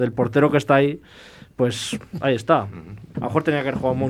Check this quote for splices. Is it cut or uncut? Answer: cut